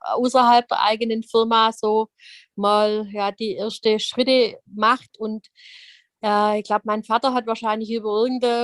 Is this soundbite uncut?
yes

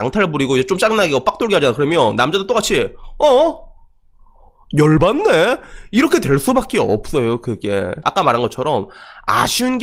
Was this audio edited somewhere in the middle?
yes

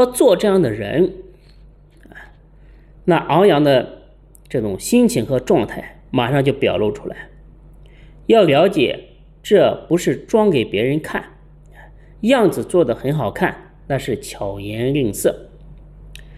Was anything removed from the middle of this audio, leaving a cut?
no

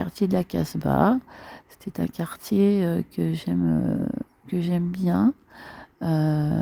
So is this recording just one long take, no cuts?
yes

